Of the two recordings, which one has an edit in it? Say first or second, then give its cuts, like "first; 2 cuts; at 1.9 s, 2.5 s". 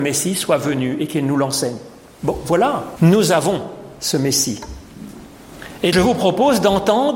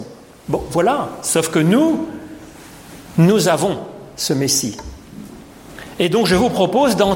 first; 2 cuts; at 3.0 s, 5.9 s